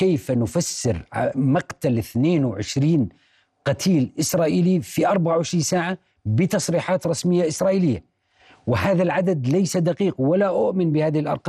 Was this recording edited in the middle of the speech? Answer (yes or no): no